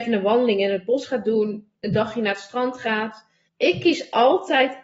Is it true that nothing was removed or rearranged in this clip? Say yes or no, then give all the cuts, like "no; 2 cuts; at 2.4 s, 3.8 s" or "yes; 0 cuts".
no; 1 cut; at 3.5 s